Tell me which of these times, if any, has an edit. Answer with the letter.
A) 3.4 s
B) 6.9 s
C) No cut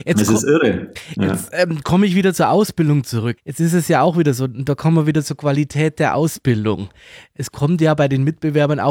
A